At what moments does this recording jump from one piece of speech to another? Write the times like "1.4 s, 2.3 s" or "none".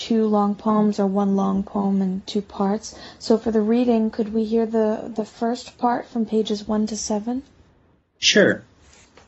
none